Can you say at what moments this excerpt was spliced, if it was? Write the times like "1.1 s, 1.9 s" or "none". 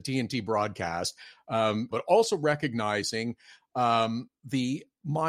1.9 s